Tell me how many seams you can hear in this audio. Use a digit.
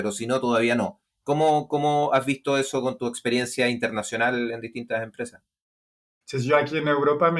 1